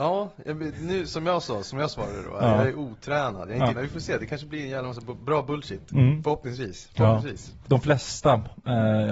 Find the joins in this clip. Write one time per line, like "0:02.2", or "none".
0:03.7
0:07.6